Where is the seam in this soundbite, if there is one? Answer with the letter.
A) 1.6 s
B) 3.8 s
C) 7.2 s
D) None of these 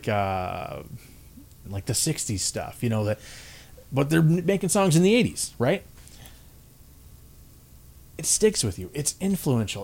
A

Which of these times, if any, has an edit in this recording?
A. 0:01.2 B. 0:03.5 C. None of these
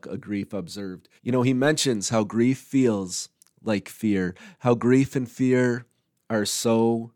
A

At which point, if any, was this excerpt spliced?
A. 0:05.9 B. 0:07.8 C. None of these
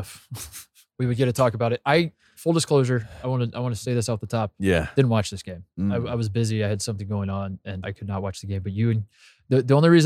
B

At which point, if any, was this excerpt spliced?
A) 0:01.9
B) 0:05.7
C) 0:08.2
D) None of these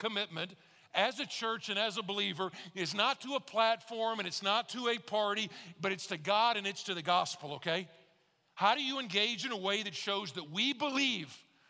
D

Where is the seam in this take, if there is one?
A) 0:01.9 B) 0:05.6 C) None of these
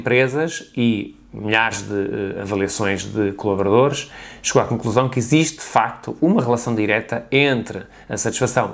C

